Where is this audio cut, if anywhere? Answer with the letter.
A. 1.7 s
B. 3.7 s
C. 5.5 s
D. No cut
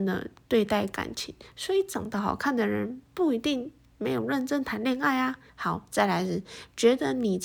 C